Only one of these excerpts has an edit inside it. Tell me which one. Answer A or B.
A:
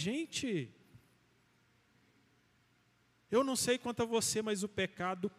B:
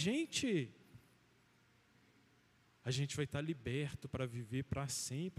B